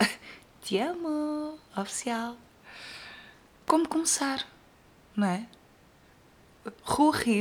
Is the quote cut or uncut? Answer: uncut